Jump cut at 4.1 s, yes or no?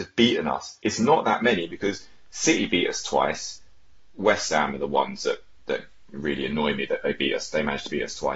no